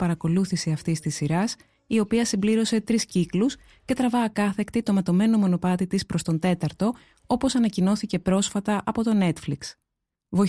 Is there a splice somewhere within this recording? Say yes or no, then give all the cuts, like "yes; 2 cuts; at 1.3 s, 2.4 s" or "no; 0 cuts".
no; 0 cuts